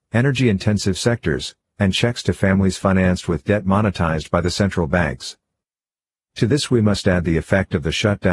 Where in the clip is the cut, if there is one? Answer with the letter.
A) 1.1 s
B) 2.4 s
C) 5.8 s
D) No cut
D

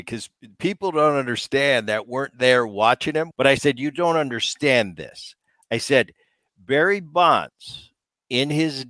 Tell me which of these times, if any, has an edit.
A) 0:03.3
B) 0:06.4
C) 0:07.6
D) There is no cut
A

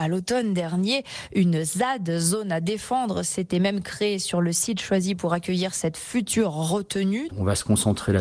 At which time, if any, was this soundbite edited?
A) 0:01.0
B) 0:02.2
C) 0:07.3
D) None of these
C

